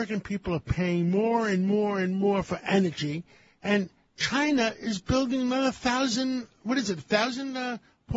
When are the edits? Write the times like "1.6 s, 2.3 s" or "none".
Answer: none